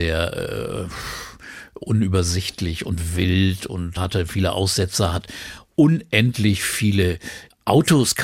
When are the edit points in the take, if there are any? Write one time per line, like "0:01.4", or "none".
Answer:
0:04.0